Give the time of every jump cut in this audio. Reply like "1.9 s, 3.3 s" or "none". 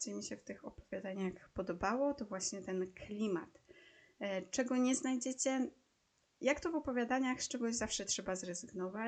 none